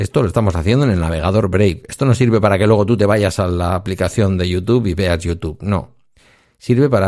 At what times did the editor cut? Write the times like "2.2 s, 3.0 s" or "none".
none